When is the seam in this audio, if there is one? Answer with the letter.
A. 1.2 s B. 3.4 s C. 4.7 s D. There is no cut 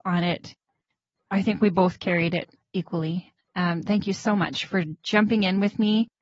B